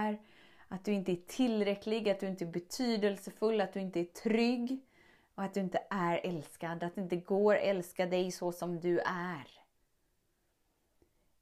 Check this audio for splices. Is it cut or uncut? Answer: uncut